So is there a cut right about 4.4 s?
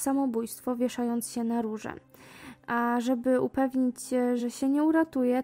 no; 0 cuts

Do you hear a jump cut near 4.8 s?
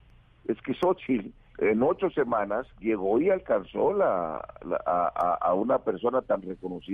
no; 2 cuts; at 1.5 s, 2.7 s

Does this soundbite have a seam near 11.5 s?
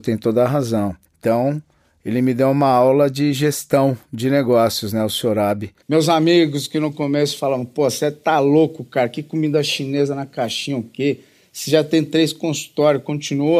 no; 2 cuts; at 1.1 s, 5.8 s

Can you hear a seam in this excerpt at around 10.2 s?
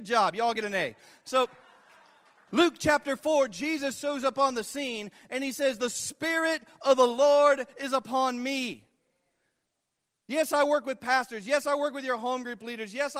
no; 0 cuts

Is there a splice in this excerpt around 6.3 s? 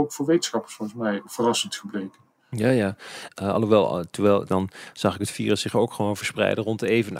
no; 2 cuts; at 3.3 s, 4.5 s

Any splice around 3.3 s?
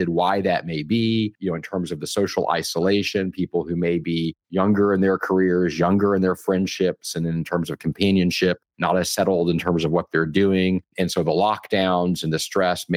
no; 0 cuts

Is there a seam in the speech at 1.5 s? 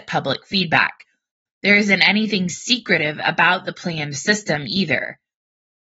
yes; 1 cut; at 1.5 s

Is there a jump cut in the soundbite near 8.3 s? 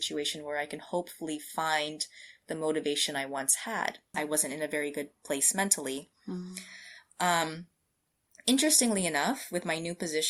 no; 1 cut; at 4.1 s

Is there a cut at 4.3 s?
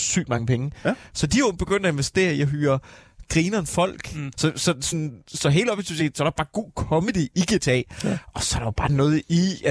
yes; 1 cut; at 4.3 s

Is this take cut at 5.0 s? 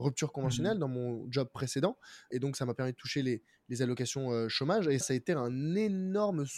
yes; 2 cuts; at 2.3 s, 5.0 s

